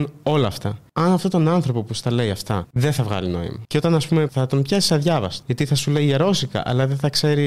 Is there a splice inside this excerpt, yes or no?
yes